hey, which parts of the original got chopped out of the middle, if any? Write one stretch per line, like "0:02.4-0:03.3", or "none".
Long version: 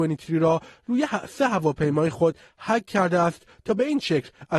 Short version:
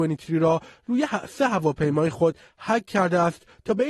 none